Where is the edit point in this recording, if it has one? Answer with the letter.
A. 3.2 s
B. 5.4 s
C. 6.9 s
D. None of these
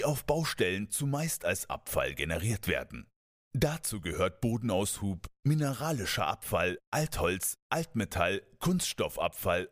D